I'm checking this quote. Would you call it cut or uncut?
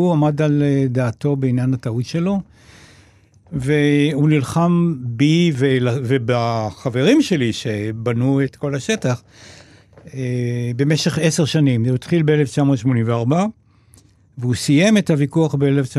cut